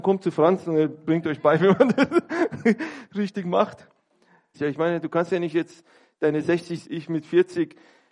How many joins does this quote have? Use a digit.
2